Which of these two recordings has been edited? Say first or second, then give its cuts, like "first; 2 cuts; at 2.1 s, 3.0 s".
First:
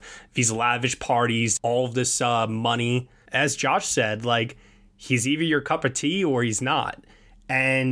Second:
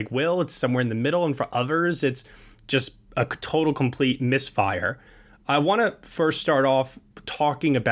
first; 2 cuts; at 1.6 s, 3.3 s